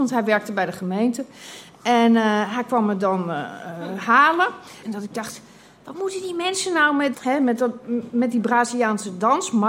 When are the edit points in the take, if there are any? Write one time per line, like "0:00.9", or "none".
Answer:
0:04.8
0:07.1